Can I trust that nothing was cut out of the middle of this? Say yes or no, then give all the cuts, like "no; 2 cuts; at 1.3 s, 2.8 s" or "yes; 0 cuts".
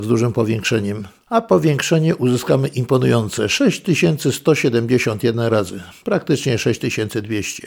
yes; 0 cuts